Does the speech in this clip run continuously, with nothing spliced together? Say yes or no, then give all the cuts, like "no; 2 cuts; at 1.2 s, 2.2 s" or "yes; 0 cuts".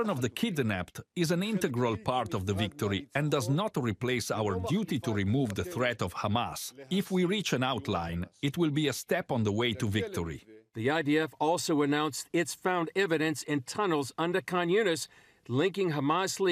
yes; 0 cuts